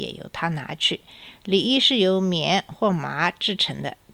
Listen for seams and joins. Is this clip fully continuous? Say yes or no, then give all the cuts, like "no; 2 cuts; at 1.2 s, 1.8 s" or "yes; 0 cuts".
yes; 0 cuts